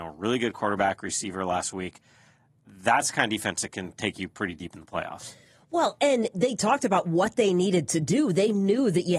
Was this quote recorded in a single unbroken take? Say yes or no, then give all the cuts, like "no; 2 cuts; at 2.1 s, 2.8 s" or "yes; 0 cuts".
yes; 0 cuts